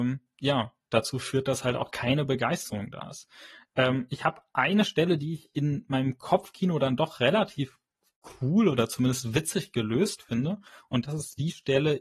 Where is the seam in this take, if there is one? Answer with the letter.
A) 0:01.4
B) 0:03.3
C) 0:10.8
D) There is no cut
D